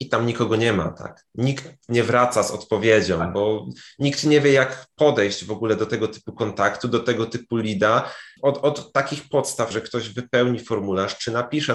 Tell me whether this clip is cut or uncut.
cut